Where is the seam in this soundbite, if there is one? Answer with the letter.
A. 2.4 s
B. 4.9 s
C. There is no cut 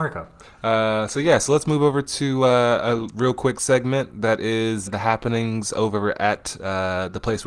B